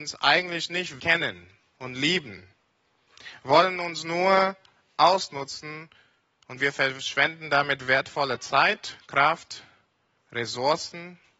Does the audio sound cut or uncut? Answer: cut